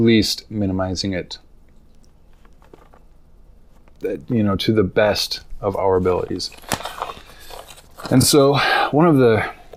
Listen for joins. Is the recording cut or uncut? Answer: uncut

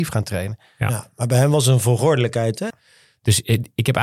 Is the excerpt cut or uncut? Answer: cut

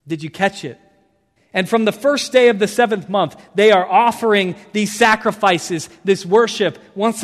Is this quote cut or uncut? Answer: cut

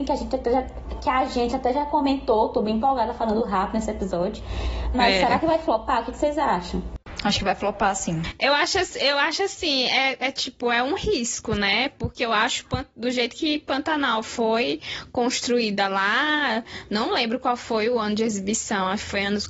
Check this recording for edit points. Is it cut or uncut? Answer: cut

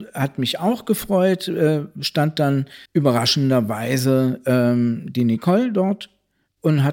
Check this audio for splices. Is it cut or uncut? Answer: cut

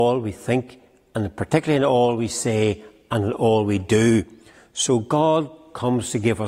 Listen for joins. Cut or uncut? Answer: uncut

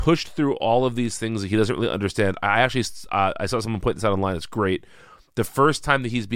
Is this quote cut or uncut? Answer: uncut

